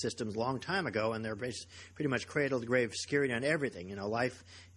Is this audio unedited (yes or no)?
yes